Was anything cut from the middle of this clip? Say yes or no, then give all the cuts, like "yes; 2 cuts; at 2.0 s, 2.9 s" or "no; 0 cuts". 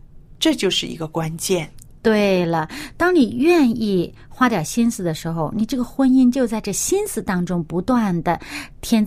no; 0 cuts